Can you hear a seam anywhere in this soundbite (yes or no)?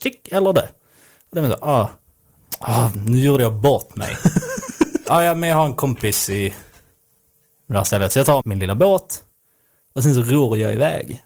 yes